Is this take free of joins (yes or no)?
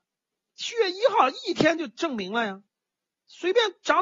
yes